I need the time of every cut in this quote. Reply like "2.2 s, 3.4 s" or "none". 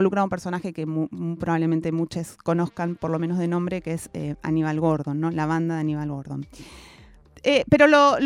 none

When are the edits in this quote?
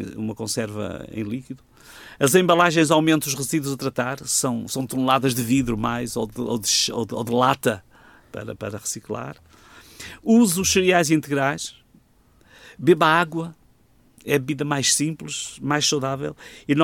none

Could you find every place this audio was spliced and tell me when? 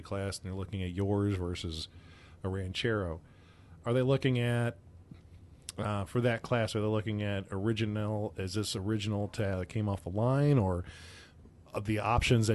none

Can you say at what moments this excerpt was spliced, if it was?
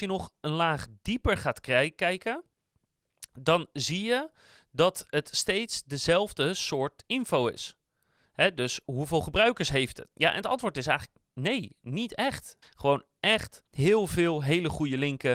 10.1 s, 12.6 s, 13.7 s

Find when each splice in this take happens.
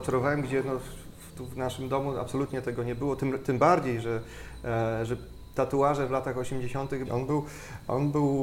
7.1 s

